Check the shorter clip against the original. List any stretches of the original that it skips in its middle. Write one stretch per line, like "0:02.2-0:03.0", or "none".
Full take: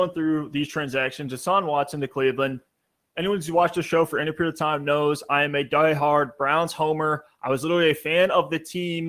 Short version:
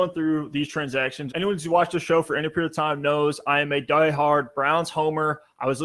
0:01.3-0:03.1

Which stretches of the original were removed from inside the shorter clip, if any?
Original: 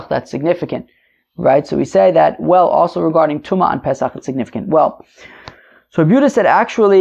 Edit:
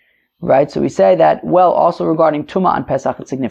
none

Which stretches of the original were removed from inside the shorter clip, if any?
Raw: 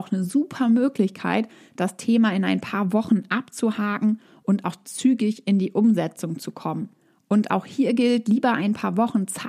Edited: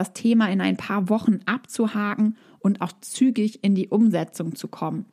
none

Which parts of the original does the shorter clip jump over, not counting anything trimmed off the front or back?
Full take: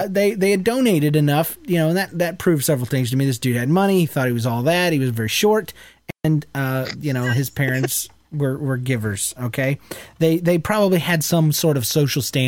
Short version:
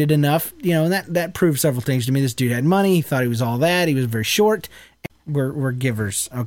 0:06.1-0:08.1

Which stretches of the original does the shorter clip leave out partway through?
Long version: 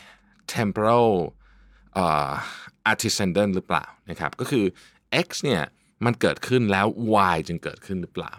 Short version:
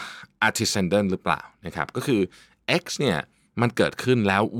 none

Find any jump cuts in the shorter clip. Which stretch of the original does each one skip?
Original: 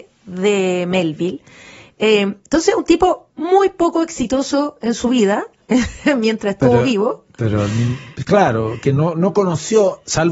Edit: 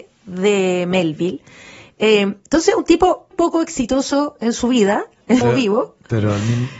0:03.3-0:03.7
0:05.8-0:06.7

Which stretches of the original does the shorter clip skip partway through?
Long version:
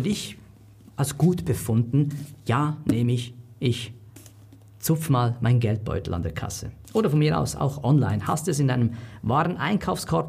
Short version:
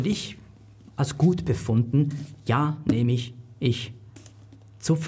none

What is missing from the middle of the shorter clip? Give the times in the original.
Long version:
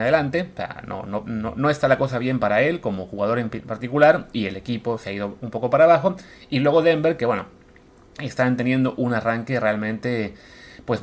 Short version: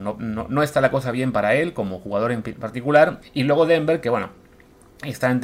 0:04.3-0:06.4

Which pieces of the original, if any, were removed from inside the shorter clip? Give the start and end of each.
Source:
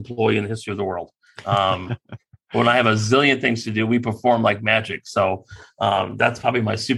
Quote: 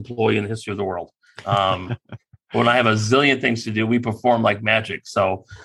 none

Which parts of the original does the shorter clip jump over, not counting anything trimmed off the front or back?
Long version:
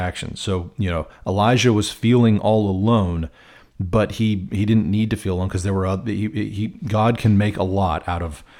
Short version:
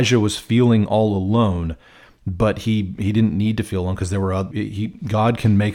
0:06.0-0:06.3

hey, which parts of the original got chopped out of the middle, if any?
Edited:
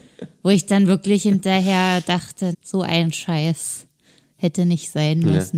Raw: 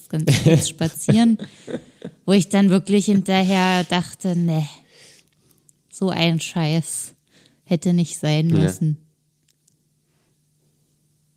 0:04.3-0:05.8

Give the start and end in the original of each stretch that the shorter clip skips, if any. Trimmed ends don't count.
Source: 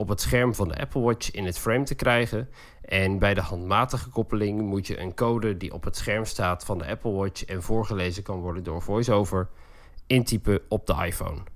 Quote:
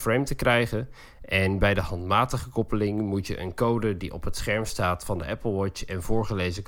none

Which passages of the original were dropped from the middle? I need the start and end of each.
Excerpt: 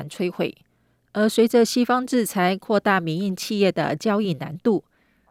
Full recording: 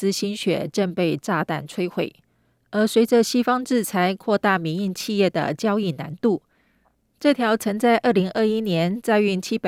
none

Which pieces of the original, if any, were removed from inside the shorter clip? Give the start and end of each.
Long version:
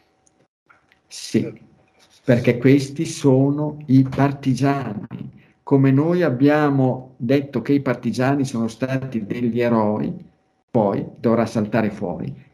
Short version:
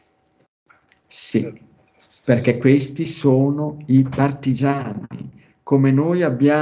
none

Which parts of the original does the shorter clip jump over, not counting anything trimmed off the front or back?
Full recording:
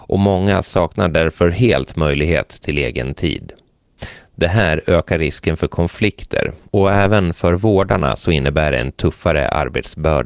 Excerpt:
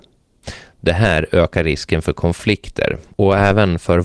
none

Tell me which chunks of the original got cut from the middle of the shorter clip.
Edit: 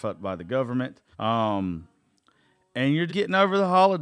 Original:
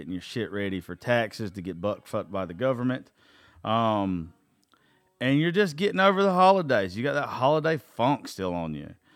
0:03.2-0:03.6
0:05.5-0:05.7

